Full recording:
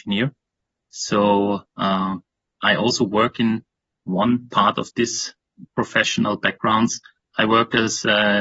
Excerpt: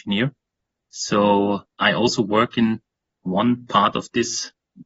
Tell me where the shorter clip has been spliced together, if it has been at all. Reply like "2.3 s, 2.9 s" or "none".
1.7 s

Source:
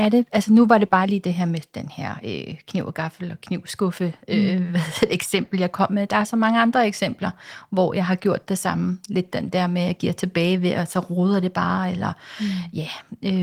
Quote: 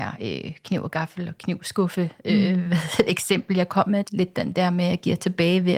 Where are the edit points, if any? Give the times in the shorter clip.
4.0 s

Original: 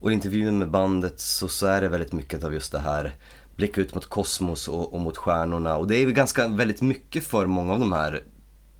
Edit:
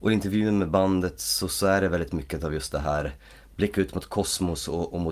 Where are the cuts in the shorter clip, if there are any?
none

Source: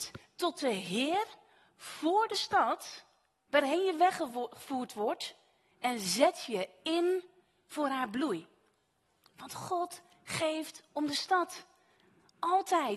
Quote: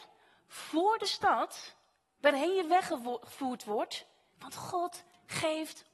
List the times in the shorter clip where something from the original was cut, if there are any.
4.3 s

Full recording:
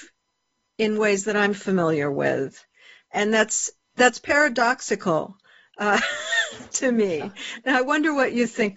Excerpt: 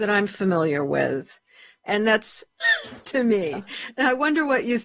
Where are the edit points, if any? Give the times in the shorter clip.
2.6 s

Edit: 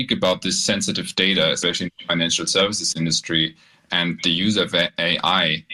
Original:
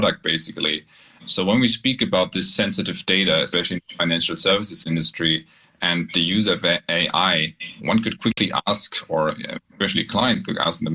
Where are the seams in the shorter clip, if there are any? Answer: none

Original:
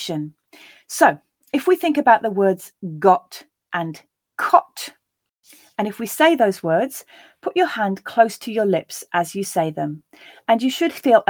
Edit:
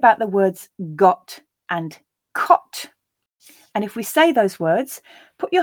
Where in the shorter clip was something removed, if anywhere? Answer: none

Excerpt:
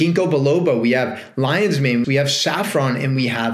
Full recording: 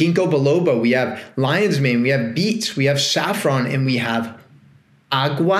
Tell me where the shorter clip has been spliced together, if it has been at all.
2.0 s

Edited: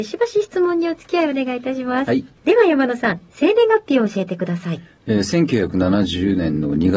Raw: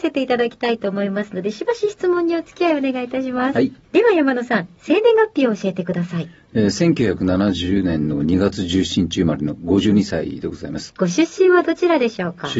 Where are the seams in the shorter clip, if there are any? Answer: none

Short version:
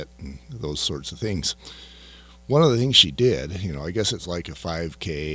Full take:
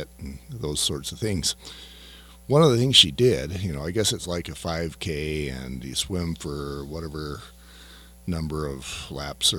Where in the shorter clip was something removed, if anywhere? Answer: none

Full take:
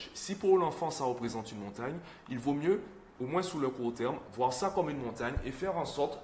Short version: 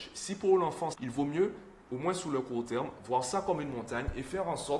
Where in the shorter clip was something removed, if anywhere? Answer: 0.9 s

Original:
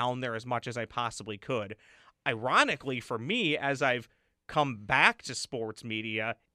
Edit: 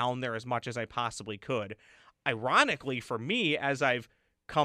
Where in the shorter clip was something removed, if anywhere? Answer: none

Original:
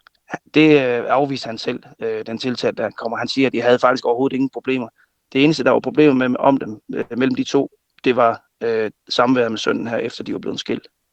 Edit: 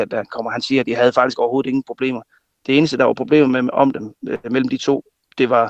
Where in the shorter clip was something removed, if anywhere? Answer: none

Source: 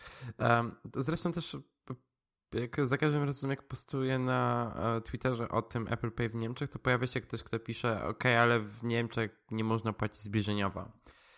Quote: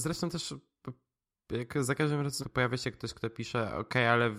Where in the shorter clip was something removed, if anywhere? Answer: 2.4 s

